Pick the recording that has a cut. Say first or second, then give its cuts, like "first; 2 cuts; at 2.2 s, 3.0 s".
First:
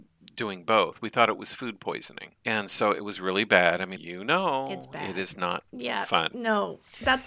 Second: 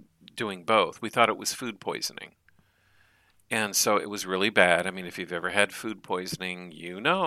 first; 2 cuts; at 2.4 s, 4.0 s